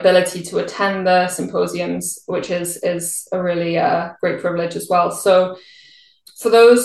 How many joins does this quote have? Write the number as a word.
zero